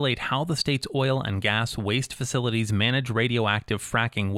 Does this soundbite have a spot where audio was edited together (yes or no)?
no